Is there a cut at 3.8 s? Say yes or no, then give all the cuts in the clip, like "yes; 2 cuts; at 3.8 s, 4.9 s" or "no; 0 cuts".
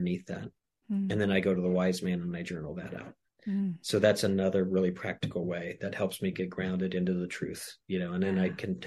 no; 0 cuts